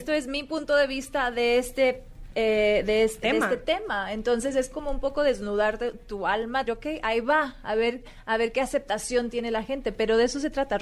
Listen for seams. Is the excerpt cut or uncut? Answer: cut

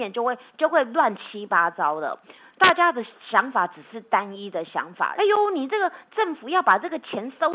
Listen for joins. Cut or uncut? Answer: cut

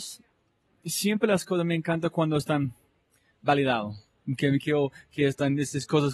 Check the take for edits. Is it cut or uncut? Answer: uncut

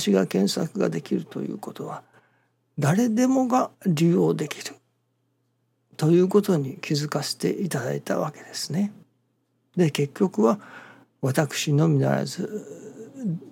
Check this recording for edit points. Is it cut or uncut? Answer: uncut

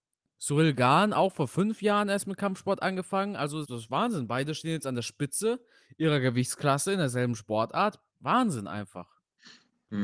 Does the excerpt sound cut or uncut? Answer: cut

